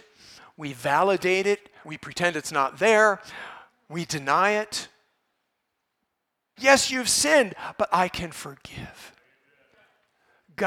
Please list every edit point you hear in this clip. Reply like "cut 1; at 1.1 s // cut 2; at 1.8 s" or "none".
cut 1; at 1.8 s // cut 2; at 6.6 s

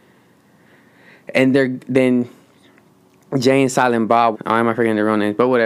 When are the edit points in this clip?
cut 1; at 1.5 s // cut 2; at 4.3 s

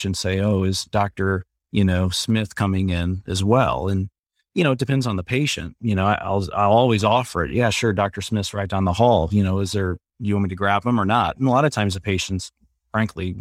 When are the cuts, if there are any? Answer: none

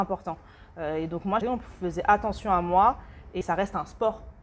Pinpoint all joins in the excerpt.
cut 1; at 1.4 s // cut 2; at 3.4 s

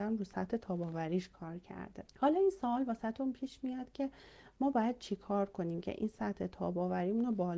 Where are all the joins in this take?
cut 1; at 2.1 s

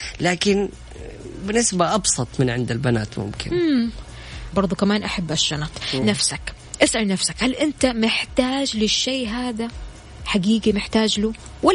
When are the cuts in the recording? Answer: cut 1; at 4.5 s // cut 2; at 6.0 s

